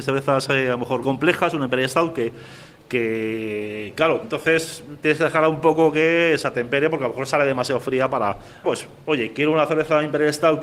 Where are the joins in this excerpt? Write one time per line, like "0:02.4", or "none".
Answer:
0:01.0
0:04.2
0:08.6